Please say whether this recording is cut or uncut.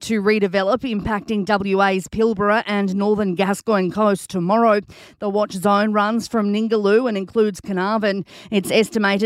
uncut